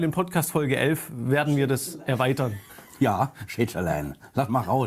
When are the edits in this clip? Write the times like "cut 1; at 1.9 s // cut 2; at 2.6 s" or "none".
none